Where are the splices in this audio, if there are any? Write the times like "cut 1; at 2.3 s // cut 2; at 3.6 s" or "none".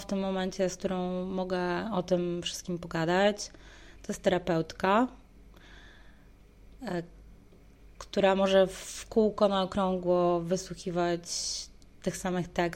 none